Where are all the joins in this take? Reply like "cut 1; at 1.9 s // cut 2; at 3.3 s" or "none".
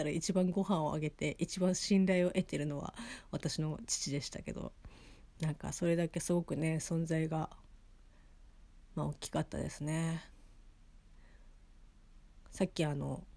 cut 1; at 5.4 s

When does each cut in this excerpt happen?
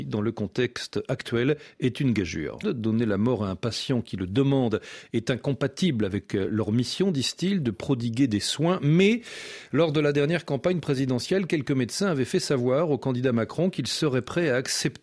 cut 1; at 2.6 s

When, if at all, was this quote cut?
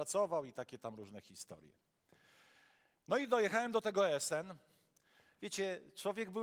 none

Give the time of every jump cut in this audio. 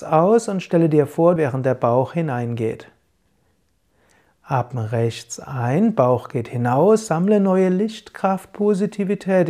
cut 1; at 1.4 s

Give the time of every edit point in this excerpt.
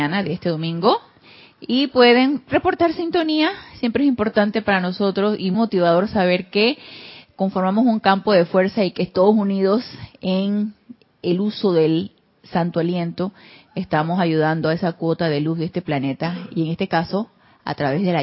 cut 1; at 5.5 s

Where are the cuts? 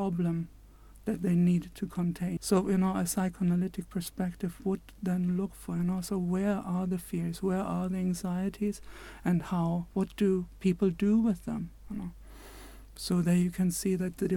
cut 1; at 2.4 s

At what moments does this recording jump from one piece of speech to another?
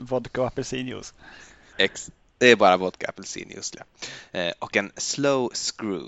cut 1; at 1.7 s

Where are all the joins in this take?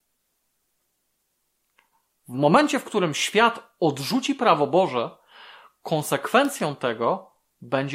none

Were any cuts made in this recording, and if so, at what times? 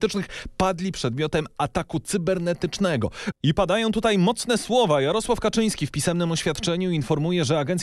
cut 1; at 3.3 s

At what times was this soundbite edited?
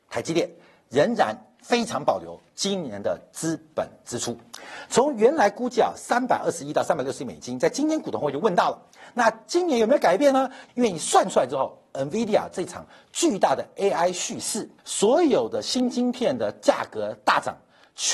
cut 1; at 10.7 s // cut 2; at 14.8 s

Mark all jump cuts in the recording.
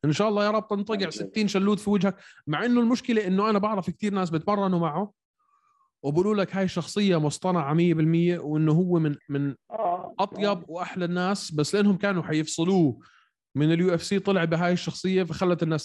none

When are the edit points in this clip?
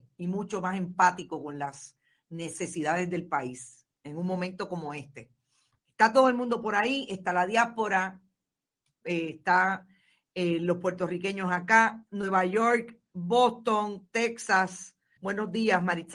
cut 1; at 15.2 s

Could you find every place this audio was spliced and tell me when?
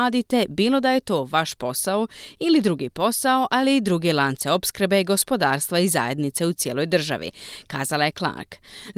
none

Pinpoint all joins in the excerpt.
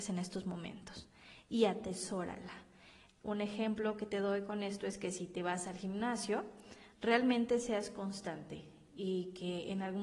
none

